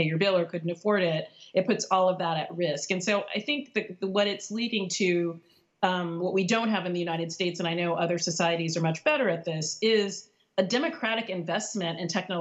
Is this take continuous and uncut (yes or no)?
yes